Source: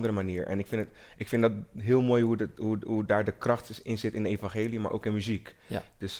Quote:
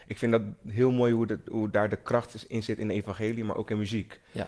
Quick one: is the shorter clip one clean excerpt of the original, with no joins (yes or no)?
no